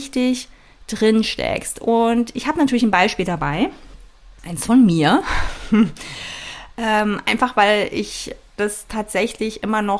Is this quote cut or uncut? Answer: uncut